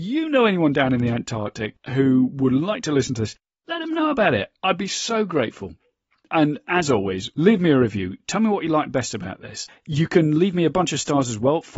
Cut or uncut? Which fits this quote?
cut